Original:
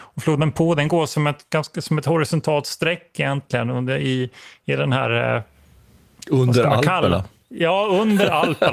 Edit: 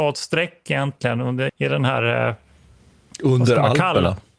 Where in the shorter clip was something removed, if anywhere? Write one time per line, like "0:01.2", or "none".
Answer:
0:01.5